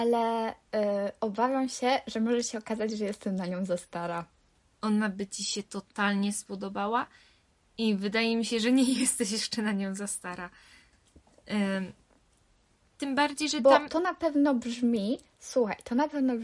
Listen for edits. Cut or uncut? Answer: uncut